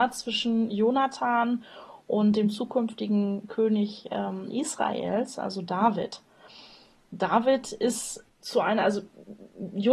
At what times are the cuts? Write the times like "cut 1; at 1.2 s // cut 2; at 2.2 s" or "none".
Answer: none